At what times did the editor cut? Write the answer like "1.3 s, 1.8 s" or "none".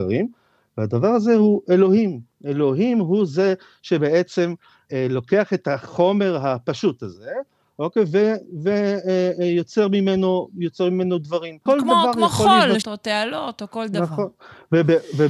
4.9 s, 11.7 s, 12.8 s